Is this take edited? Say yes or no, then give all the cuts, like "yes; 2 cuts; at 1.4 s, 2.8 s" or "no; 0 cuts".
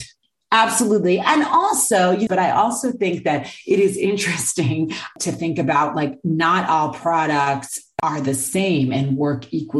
yes; 1 cut; at 2.3 s